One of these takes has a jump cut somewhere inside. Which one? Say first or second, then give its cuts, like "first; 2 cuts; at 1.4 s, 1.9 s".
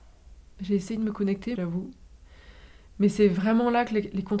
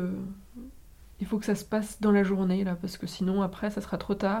first; 1 cut; at 1.6 s